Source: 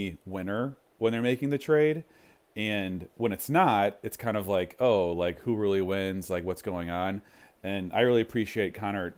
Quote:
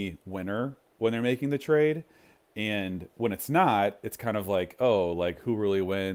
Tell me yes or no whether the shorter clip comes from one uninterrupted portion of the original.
yes